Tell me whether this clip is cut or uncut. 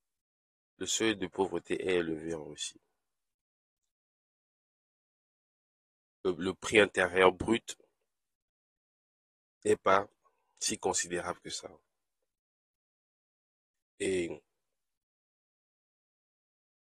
uncut